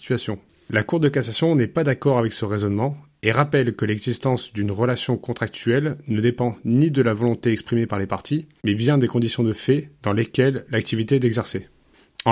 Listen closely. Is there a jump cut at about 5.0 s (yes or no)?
no